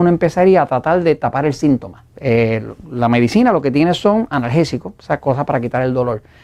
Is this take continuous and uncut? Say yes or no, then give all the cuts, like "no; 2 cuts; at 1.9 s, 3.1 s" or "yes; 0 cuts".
no; 1 cut; at 2.1 s